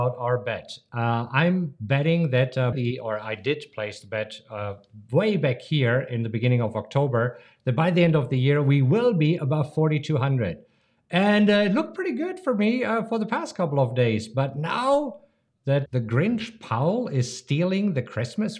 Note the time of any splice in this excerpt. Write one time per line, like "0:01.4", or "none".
0:02.7
0:15.9